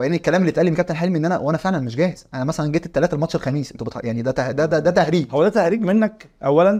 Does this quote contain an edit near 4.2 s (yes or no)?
no